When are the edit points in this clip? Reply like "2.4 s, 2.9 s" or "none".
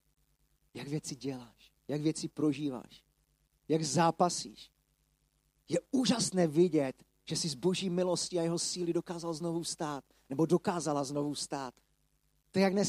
1.8 s, 7.1 s